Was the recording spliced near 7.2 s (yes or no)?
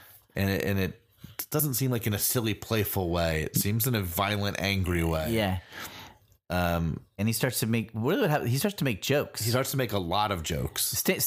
yes